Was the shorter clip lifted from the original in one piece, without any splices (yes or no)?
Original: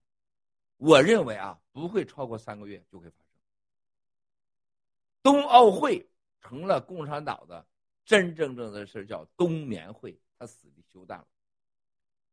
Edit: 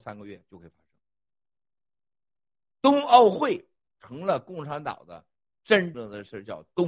no